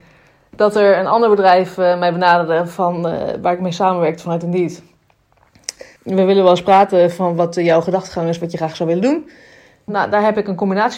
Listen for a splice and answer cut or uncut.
cut